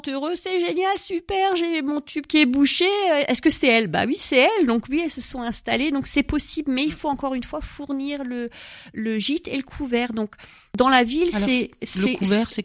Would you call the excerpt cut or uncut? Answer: uncut